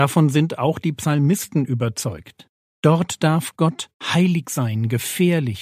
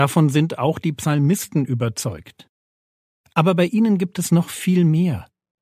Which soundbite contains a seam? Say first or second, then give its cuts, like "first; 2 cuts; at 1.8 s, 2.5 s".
first; 2 cuts; at 2.8 s, 3.9 s